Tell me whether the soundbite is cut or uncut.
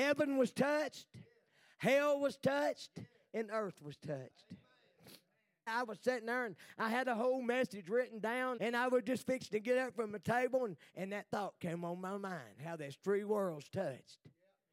cut